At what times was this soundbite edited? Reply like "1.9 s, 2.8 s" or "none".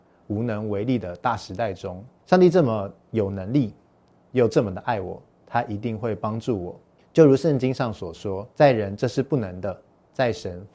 2.2 s, 8.5 s